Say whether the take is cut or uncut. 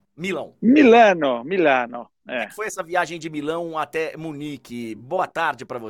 uncut